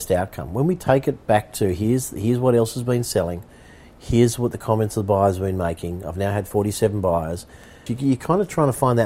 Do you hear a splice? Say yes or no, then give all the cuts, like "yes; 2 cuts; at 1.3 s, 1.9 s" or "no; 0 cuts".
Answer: yes; 1 cut; at 7.9 s